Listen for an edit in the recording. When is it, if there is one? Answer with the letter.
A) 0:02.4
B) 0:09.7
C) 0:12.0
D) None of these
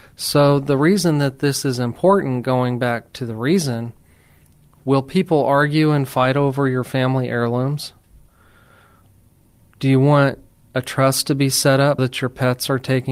C